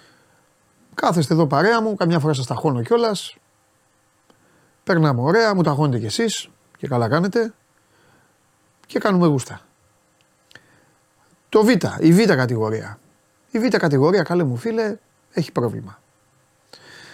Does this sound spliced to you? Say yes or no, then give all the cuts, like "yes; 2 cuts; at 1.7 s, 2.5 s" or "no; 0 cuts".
no; 0 cuts